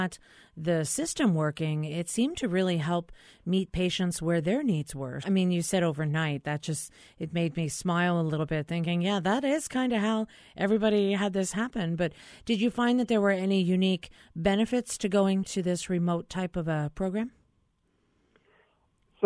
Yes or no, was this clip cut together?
yes